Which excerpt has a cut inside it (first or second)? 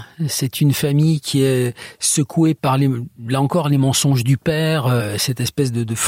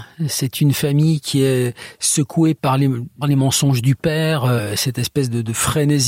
second